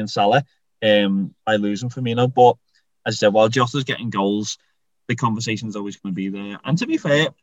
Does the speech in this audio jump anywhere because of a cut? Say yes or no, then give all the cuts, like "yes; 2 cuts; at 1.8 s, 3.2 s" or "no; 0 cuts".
no; 0 cuts